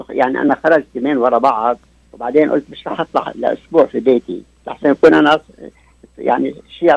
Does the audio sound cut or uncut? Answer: uncut